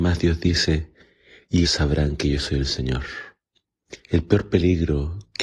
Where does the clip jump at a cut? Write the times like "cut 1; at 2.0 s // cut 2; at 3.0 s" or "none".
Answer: cut 1; at 1.6 s // cut 2; at 4.0 s